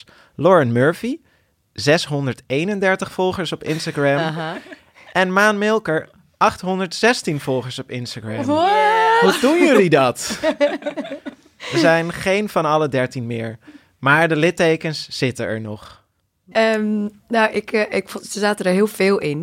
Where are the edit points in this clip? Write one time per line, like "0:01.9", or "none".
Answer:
0:16.5